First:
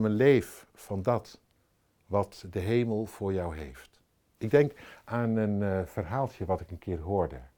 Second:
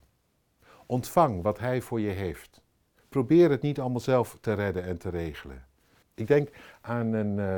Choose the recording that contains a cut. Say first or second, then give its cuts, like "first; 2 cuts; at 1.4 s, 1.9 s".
second; 1 cut; at 6.0 s